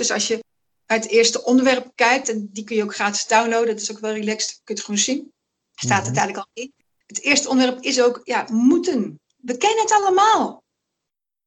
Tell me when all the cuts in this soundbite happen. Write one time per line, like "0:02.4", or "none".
none

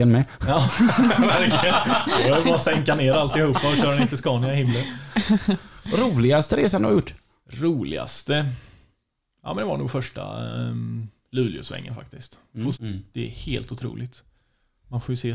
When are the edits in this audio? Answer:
0:12.7

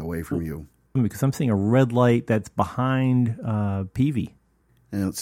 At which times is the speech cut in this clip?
0:01.0

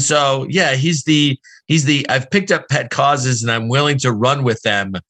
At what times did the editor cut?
none

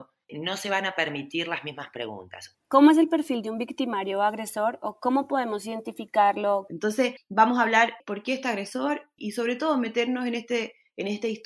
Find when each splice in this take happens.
0:02.5
0:06.7

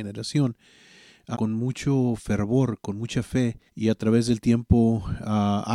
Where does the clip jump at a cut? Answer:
0:01.3
0:03.7

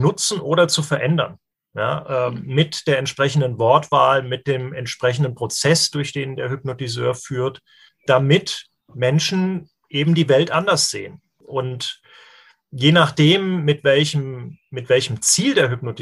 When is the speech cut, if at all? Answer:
none

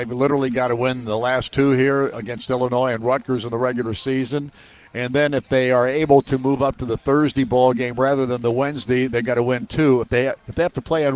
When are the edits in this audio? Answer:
none

